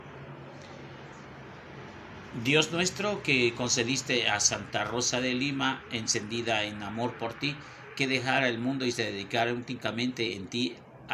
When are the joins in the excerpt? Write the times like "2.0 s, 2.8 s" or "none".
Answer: none